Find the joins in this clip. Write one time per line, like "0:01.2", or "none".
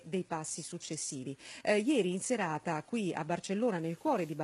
none